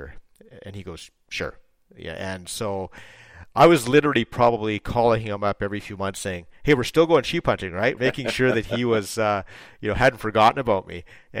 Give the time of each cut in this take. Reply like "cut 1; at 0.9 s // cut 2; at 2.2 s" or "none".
cut 1; at 8.0 s

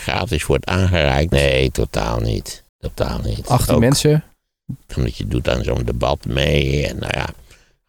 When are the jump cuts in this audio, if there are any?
cut 1; at 1.3 s // cut 2; at 2.7 s // cut 3; at 4.9 s

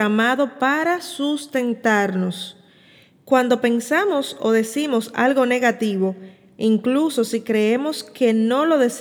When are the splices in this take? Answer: none

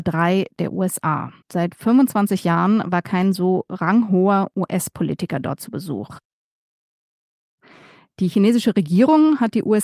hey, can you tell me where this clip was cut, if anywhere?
cut 1; at 1.4 s

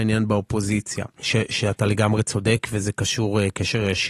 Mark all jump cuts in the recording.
cut 1; at 1.2 s

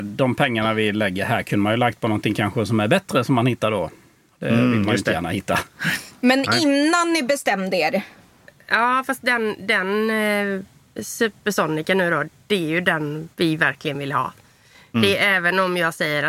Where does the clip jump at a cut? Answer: cut 1; at 13.3 s

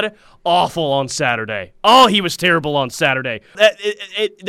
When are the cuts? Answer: cut 1; at 3.5 s

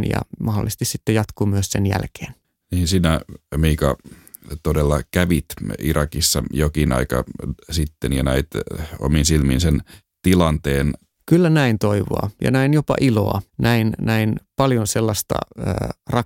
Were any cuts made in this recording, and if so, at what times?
cut 1; at 11.1 s // cut 2; at 13.5 s

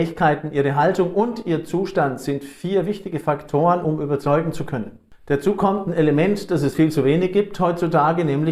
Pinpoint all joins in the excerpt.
none

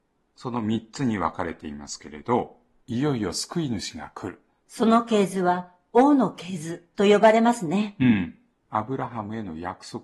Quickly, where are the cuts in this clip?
cut 1; at 4.6 s

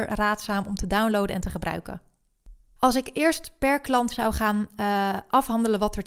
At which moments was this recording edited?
cut 1; at 2.8 s

